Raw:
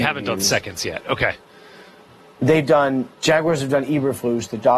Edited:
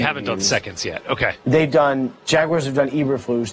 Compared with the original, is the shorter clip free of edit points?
no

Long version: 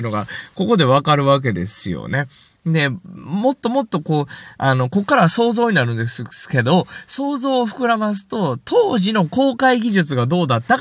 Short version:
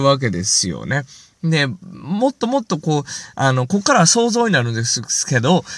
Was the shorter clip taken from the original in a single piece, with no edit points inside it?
yes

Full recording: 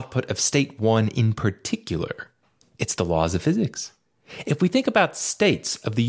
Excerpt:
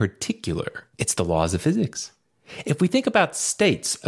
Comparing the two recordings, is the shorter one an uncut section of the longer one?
no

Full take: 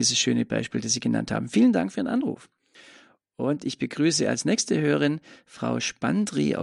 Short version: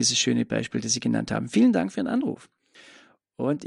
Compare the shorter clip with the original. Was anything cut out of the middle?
no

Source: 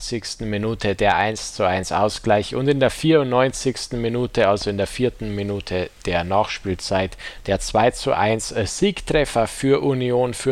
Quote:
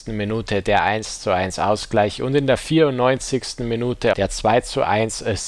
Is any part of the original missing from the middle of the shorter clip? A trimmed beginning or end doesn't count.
yes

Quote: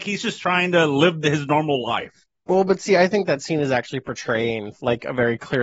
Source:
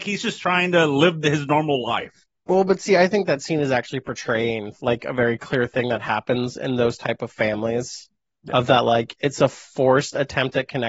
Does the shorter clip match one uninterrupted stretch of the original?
yes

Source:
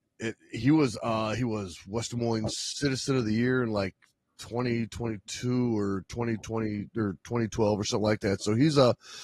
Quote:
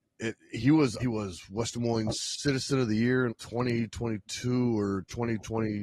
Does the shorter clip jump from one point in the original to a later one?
yes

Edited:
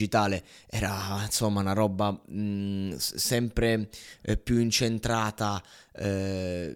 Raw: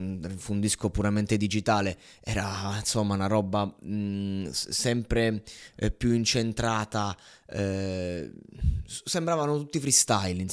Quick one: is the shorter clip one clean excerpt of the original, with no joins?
yes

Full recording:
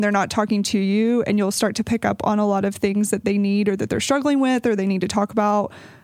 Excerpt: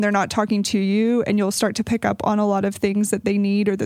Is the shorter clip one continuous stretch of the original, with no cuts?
yes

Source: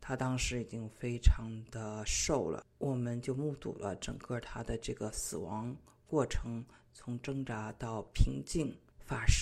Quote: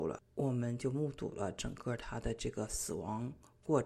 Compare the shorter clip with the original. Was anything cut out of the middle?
no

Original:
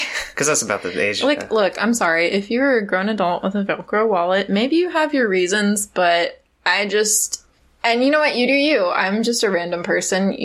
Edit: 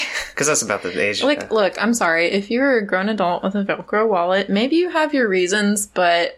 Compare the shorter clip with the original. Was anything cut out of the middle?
no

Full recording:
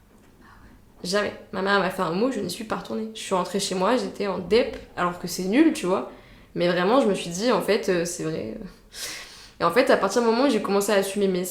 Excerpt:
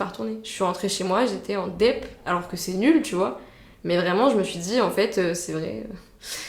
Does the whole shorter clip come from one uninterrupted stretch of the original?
yes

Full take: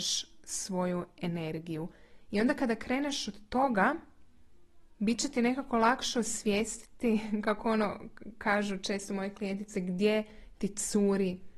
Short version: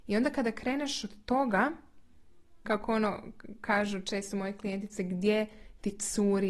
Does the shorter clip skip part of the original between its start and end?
yes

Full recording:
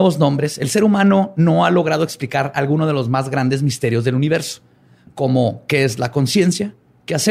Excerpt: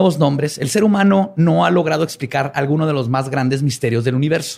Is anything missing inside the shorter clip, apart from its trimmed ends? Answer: no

